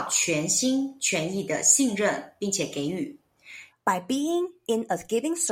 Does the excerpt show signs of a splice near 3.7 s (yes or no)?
yes